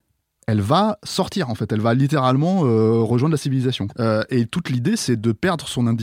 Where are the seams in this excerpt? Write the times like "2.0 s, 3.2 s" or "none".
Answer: 3.9 s